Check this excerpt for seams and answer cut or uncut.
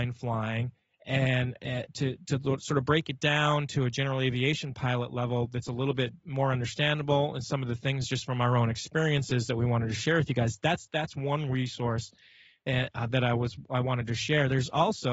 uncut